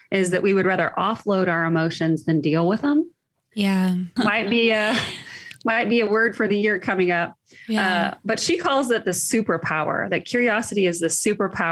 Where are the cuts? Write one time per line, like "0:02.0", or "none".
0:04.2